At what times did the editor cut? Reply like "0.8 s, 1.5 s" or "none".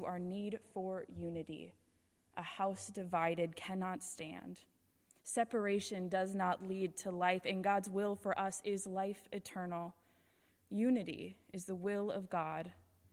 10.5 s